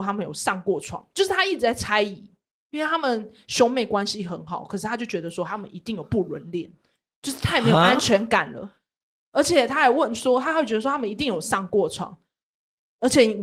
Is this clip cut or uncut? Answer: uncut